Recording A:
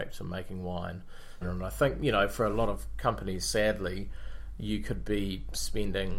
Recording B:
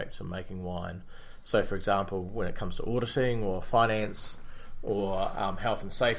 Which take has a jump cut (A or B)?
A